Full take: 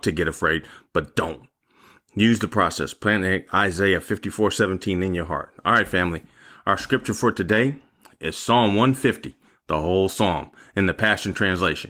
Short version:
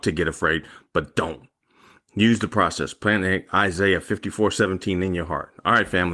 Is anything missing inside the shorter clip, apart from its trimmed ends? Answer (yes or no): no